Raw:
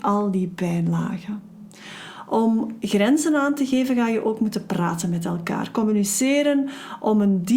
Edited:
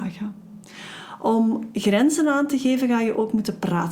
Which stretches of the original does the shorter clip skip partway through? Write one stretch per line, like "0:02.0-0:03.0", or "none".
none